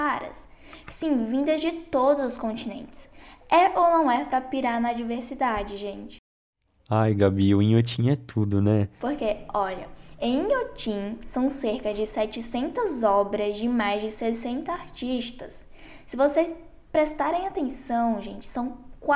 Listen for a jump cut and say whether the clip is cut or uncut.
cut